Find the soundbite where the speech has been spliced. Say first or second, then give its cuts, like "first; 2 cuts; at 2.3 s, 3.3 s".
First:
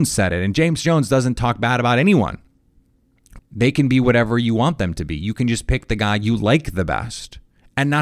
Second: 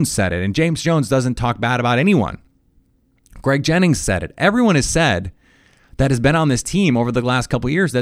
first; 1 cut; at 3.4 s